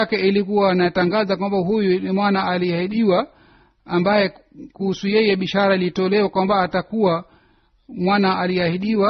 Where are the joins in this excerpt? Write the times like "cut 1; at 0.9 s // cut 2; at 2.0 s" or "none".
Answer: none